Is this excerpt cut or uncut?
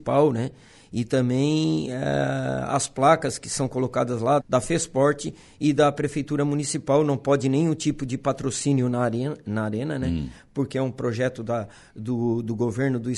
cut